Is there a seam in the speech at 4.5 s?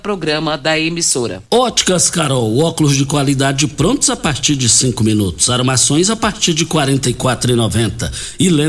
no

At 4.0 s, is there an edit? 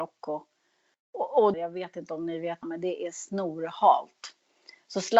no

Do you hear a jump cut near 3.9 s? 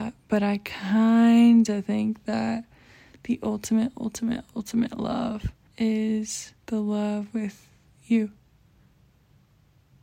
no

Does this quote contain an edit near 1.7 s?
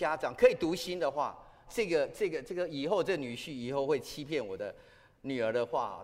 yes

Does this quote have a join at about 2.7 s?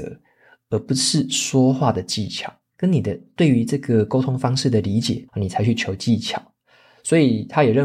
yes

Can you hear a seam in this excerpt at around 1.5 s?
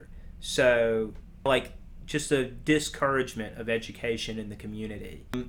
yes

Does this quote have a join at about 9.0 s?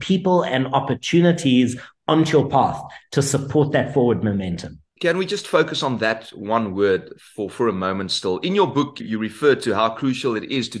yes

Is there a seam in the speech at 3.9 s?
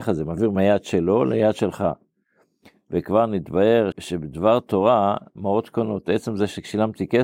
yes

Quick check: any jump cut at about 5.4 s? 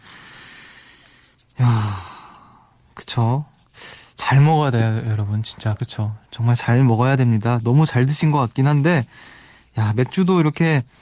no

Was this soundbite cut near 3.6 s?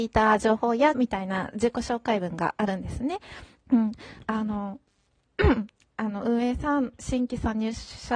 yes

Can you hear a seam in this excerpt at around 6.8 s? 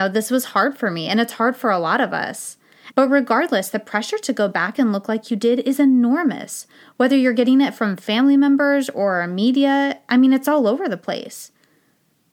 no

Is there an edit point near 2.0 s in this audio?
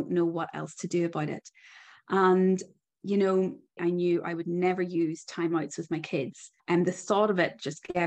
no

